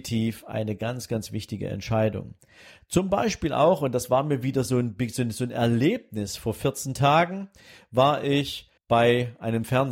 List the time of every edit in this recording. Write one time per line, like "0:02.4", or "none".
0:08.8